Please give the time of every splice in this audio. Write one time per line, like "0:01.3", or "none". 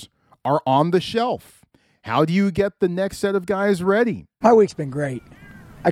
0:04.4